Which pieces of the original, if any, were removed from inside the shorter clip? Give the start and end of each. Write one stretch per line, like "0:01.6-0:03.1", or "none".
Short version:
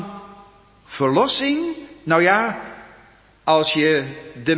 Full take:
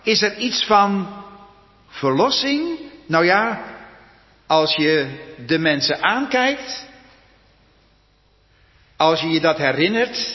none